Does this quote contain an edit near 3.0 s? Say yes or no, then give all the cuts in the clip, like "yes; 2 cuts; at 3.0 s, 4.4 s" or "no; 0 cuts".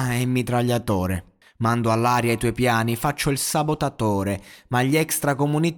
no; 1 cut; at 1.4 s